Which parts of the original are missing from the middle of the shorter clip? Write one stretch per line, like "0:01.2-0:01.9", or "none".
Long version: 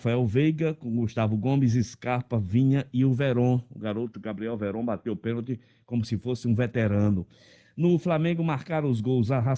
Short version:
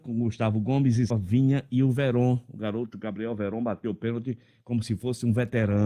0:01.9-0:02.3